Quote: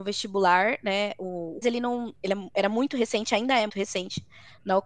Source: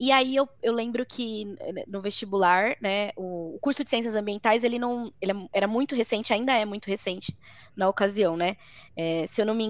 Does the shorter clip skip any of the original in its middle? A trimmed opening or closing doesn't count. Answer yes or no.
yes